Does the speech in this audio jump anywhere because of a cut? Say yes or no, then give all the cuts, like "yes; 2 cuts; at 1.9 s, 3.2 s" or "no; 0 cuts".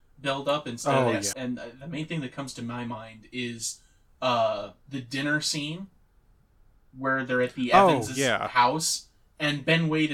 yes; 1 cut; at 1.3 s